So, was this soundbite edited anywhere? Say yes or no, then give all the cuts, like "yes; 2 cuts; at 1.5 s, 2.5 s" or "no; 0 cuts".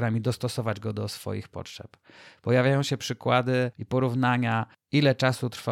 no; 0 cuts